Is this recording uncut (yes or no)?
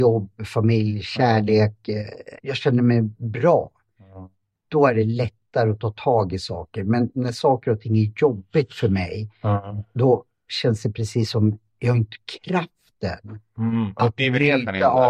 no